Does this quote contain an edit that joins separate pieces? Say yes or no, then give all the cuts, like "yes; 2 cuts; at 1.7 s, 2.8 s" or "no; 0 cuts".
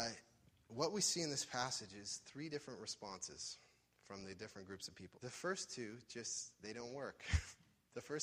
yes; 1 cut; at 5.1 s